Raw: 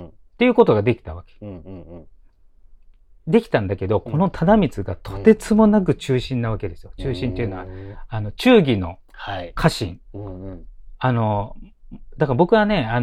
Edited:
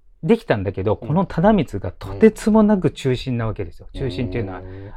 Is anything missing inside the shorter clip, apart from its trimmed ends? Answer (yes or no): no